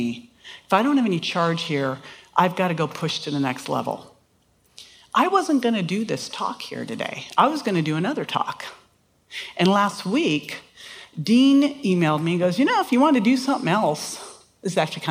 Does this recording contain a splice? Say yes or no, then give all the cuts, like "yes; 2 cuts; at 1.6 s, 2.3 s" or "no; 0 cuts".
no; 0 cuts